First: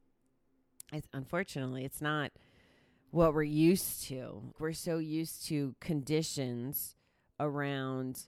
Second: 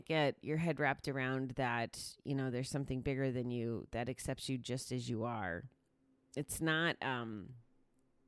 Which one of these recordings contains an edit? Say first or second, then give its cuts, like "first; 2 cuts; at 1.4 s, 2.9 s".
first; 1 cut; at 4.5 s